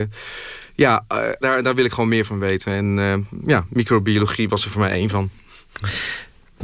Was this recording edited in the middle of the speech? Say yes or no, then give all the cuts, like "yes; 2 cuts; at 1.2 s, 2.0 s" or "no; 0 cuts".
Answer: yes; 1 cut; at 1.4 s